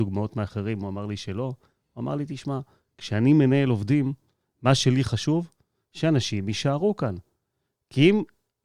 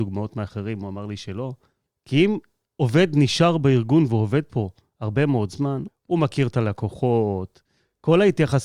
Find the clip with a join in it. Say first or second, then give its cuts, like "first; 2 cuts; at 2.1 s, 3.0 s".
second; 2 cuts; at 1.9 s, 5.9 s